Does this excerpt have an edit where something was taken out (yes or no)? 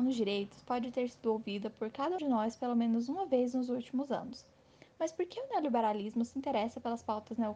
yes